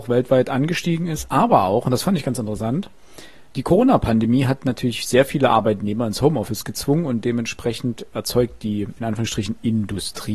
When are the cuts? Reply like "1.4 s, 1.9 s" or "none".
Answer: 3.5 s